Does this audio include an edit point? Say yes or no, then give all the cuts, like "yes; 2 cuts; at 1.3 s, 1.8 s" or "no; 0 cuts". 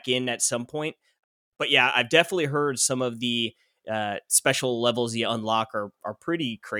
no; 0 cuts